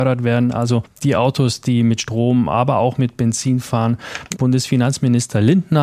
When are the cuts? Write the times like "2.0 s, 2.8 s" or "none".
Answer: 4.3 s